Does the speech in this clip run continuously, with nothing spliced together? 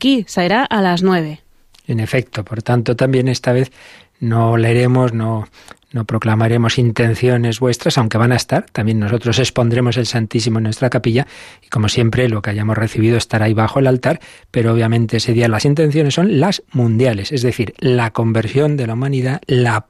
yes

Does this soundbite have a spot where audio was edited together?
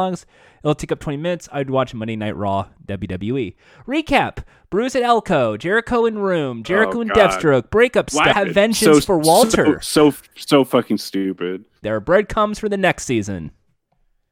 yes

